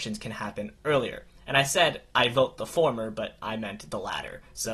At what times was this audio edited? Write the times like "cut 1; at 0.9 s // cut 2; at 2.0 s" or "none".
none